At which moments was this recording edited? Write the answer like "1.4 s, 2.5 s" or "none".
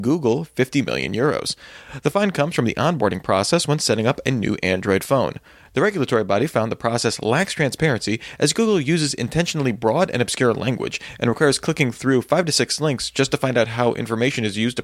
none